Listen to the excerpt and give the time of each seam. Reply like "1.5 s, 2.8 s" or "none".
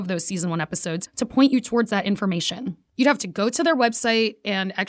1.1 s